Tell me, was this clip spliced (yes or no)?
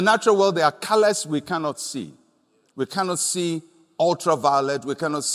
no